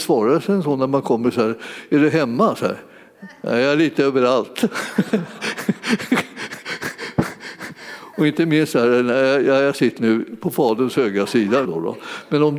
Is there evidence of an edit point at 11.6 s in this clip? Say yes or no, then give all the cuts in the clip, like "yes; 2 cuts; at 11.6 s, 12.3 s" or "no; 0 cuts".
yes; 2 cuts; at 10.0 s, 11.6 s